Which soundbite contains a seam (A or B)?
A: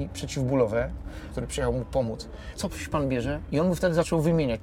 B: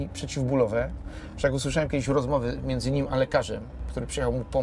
A